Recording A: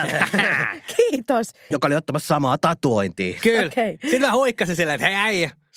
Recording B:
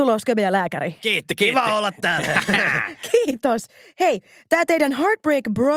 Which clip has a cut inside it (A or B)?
A